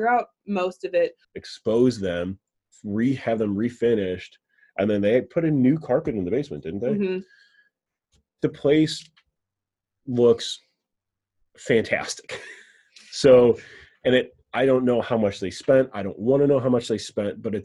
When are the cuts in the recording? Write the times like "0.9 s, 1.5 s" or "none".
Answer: 1.2 s

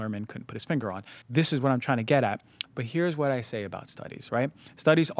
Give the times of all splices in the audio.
1.2 s, 2.6 s

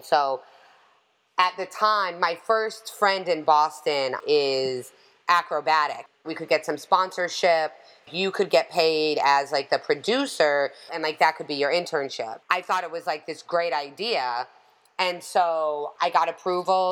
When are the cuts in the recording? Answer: 6.2 s, 10.9 s

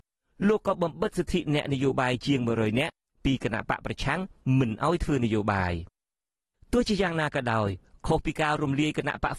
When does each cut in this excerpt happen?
none

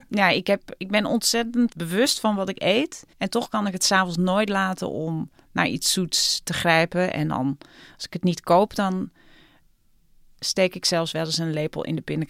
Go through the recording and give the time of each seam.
1.7 s, 3.1 s

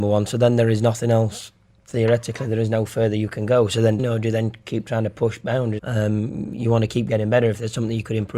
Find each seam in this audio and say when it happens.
4.0 s, 5.8 s

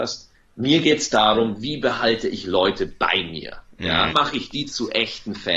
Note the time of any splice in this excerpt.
4.1 s

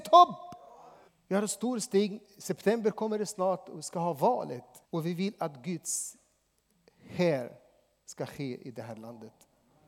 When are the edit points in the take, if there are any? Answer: 1.1 s, 4.9 s

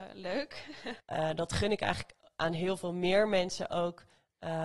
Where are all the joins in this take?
1.0 s

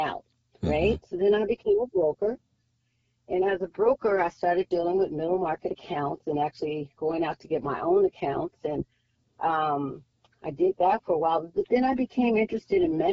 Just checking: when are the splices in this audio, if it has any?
7.0 s

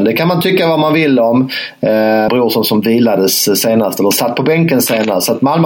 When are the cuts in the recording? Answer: 2.3 s

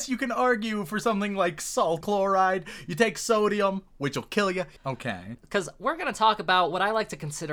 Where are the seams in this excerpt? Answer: 2.0 s, 4.8 s

